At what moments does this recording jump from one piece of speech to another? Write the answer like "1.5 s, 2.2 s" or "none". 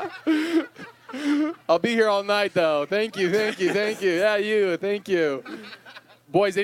none